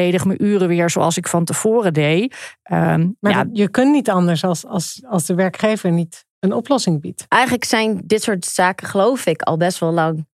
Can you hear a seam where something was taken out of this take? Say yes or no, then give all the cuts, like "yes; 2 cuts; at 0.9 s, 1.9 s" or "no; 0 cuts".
no; 0 cuts